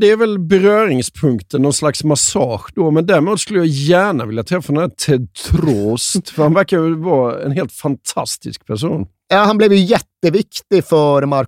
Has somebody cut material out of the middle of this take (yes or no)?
yes